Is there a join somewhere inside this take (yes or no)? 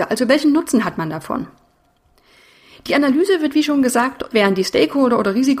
yes